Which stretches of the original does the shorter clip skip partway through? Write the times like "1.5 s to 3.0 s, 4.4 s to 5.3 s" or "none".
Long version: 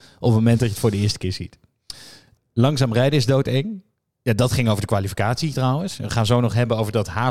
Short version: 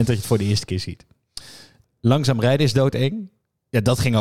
none